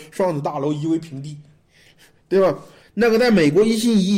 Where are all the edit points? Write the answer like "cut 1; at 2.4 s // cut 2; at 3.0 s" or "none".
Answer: cut 1; at 2.8 s

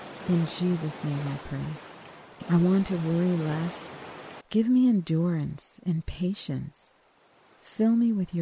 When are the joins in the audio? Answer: cut 1; at 2.4 s // cut 2; at 4.4 s

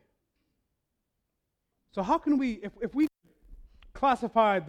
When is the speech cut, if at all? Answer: cut 1; at 1.8 s

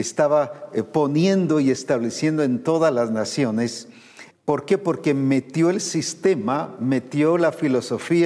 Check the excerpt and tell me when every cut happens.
cut 1; at 4.3 s

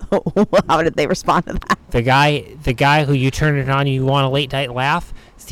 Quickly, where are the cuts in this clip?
cut 1; at 1.8 s

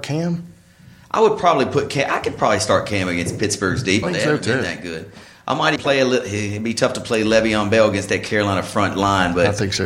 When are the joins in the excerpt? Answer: cut 1; at 4.0 s // cut 2; at 5.8 s

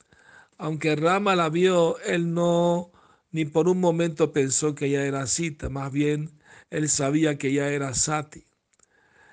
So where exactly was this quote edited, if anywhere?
none

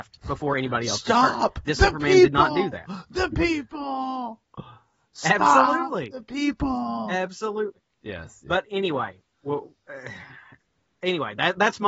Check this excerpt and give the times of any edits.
none

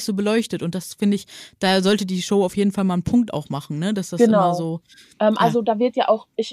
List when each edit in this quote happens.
none

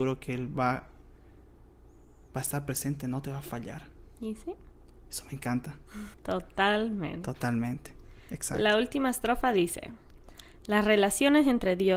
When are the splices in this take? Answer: cut 1; at 6.1 s

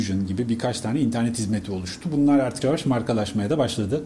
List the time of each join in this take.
cut 1; at 2.6 s

